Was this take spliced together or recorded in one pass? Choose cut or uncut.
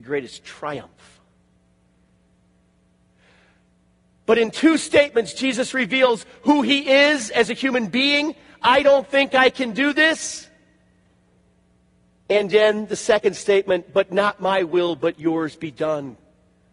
uncut